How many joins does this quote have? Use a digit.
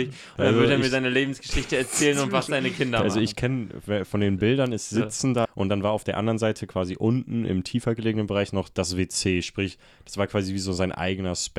1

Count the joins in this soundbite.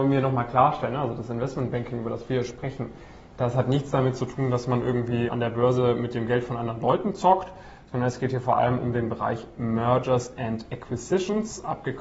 1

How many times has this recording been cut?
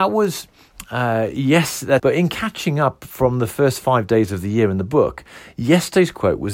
1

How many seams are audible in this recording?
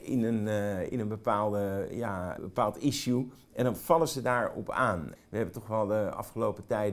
2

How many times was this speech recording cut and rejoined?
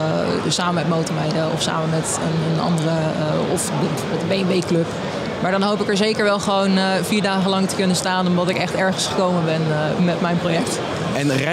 0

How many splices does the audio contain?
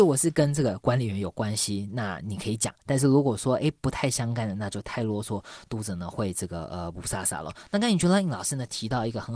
0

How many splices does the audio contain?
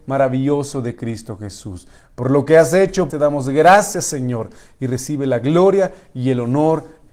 1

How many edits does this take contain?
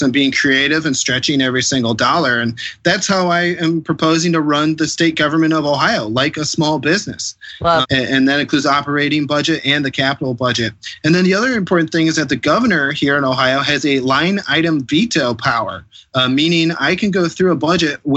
1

